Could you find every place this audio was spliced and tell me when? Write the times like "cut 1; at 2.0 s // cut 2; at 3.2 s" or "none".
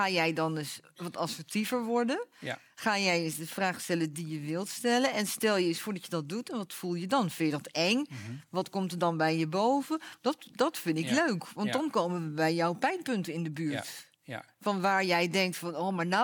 none